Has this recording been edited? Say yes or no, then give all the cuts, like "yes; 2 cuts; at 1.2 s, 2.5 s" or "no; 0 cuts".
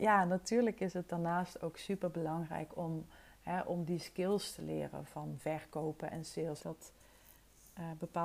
yes; 2 cuts; at 5.1 s, 6.6 s